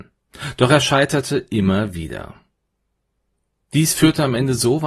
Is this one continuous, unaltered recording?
yes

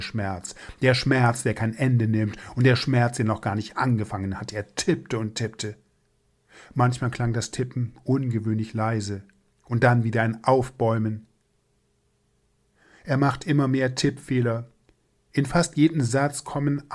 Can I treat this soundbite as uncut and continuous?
yes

